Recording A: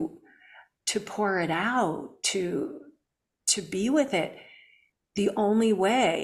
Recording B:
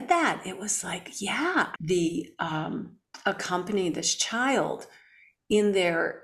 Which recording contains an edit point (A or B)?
B